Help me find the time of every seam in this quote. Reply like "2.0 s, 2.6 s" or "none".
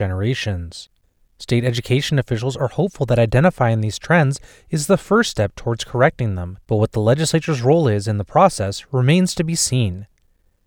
none